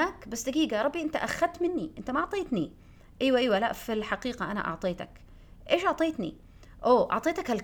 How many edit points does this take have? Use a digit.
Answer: 0